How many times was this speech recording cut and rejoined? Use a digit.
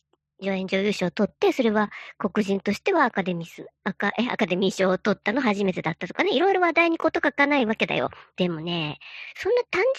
1